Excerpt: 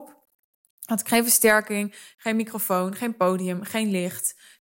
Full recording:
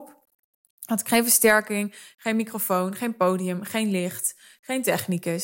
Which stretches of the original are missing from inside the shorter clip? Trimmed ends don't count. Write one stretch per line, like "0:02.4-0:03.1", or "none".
none